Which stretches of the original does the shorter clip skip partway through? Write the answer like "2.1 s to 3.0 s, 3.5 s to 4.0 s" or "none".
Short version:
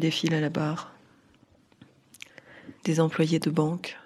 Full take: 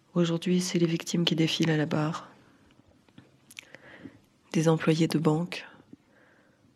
4.1 s to 4.4 s